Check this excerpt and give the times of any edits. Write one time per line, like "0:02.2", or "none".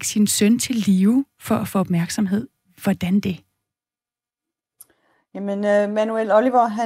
none